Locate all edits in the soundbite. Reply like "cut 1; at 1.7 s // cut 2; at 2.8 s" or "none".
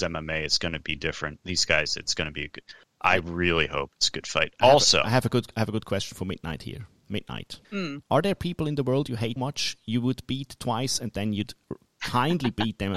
cut 1; at 7.6 s // cut 2; at 9.4 s